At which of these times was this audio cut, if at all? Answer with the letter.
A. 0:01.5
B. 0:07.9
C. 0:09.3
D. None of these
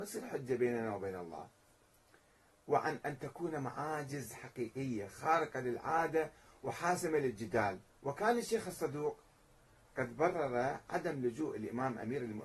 B